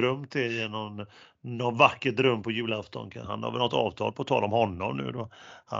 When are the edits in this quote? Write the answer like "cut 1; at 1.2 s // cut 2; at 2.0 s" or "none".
cut 1; at 3.2 s